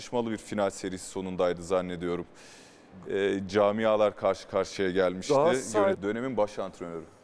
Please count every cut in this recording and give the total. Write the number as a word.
one